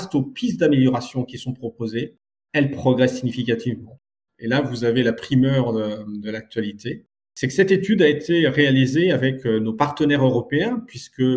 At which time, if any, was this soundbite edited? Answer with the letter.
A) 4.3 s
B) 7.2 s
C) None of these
A